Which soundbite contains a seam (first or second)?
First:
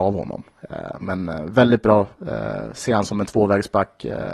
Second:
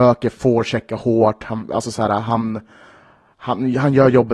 first